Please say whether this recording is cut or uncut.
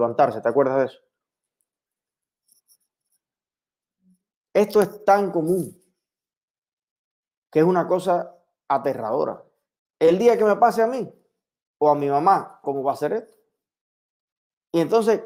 cut